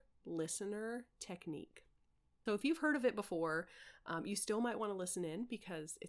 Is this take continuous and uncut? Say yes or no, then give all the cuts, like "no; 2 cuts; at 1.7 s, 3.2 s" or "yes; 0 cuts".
no; 1 cut; at 2.5 s